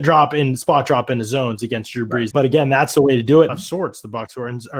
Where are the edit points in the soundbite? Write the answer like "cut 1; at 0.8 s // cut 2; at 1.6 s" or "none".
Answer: cut 1; at 2.3 s // cut 2; at 3.5 s